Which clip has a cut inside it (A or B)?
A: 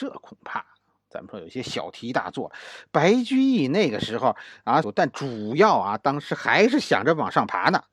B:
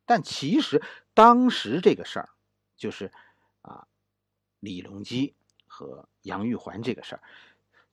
A